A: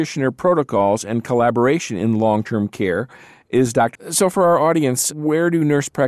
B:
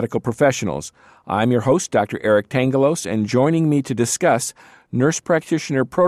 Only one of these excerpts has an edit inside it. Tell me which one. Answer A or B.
A